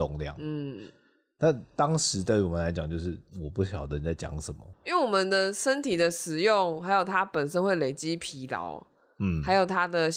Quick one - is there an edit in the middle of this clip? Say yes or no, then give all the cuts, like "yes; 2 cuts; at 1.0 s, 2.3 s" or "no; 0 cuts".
yes; 2 cuts; at 3.3 s, 4.7 s